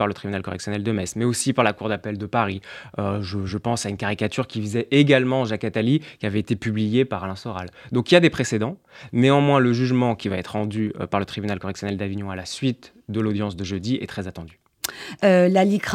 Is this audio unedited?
yes; 0 cuts

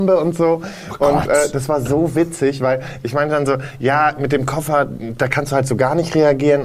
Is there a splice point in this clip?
no; 0 cuts

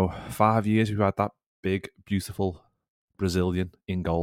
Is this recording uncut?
yes; 0 cuts

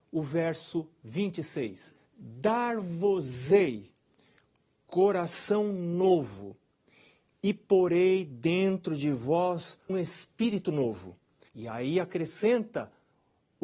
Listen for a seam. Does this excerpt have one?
yes; 3 cuts; at 2.1 s, 9.9 s, 11.5 s

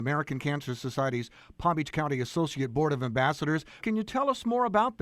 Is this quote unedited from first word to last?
no; 1 cut; at 3.8 s

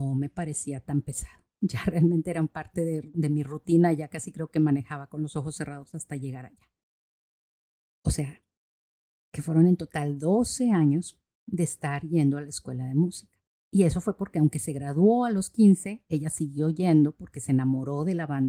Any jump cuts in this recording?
yes; 1 cut; at 7.9 s

